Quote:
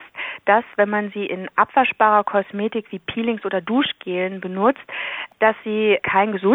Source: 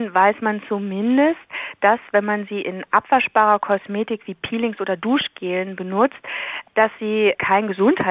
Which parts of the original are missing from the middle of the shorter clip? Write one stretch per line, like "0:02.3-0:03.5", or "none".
none